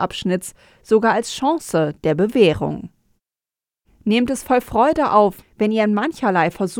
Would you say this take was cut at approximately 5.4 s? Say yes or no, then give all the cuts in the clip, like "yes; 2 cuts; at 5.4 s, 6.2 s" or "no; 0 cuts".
yes; 1 cut; at 5.4 s